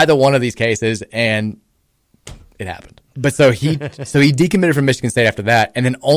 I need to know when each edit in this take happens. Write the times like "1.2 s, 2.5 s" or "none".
3.1 s